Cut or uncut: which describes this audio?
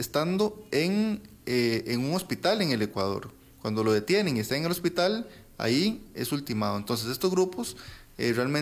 uncut